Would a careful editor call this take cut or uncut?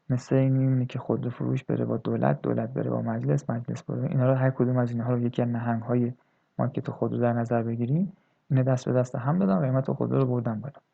uncut